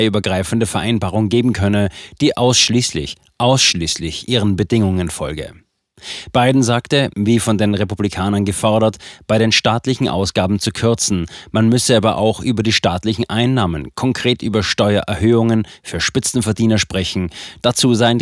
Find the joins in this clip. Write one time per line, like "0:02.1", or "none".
0:07.1